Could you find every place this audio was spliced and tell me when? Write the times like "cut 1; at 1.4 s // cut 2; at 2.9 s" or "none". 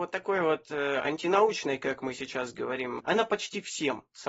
cut 1; at 3.0 s